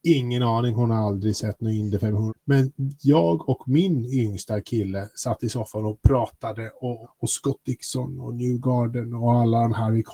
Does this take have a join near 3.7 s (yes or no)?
no